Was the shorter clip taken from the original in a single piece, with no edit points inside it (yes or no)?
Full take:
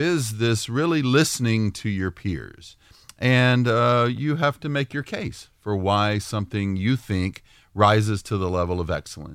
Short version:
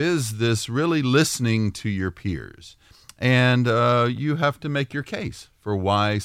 yes